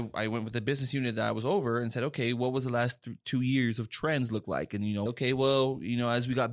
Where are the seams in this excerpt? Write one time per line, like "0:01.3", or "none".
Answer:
0:05.1